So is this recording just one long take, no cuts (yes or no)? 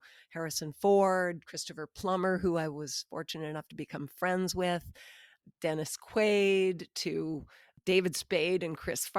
yes